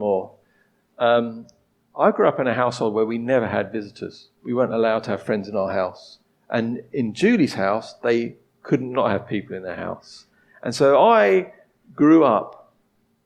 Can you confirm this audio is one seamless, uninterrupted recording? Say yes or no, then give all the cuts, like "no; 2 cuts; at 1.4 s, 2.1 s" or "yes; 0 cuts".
yes; 0 cuts